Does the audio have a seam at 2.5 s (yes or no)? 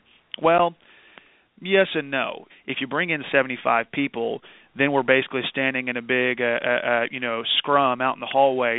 yes